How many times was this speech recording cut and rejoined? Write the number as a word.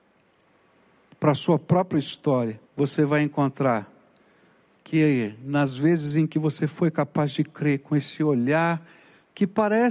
one